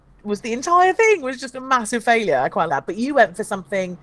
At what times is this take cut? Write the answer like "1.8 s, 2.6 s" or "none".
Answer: 2.7 s